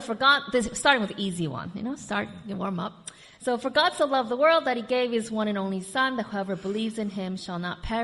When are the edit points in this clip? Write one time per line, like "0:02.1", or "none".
none